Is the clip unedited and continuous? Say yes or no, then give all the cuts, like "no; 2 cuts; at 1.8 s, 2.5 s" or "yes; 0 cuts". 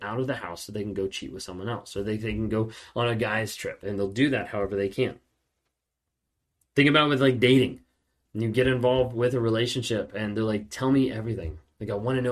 no; 1 cut; at 3.8 s